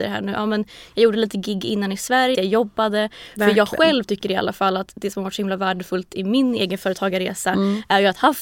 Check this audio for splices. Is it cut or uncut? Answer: cut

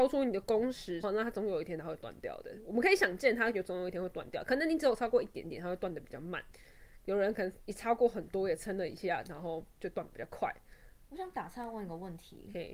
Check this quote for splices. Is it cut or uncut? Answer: cut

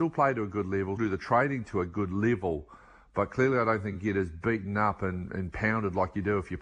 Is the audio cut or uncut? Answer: cut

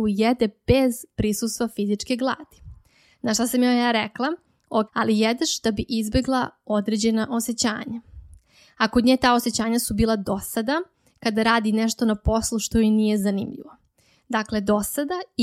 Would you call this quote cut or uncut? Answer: cut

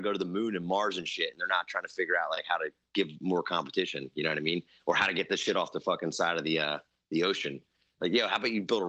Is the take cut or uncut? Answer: uncut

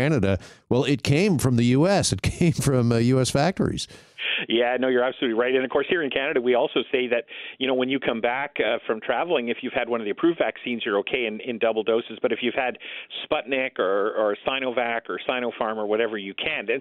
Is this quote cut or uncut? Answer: uncut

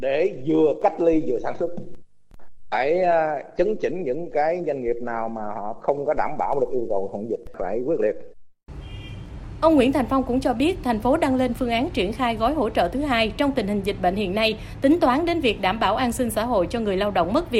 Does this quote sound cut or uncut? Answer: uncut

